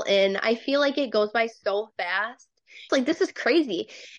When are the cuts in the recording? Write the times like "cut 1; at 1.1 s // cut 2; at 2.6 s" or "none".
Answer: cut 1; at 2.9 s